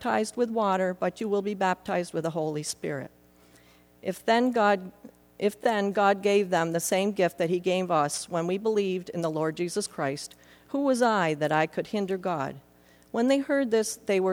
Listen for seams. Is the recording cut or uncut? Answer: uncut